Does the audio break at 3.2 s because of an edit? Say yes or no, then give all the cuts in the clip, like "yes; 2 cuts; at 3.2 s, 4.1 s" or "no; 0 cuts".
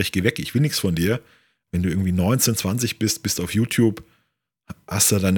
no; 1 cut; at 1.7 s